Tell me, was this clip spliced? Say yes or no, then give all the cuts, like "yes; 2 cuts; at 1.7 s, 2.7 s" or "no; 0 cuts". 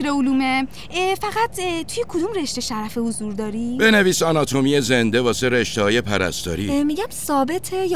no; 0 cuts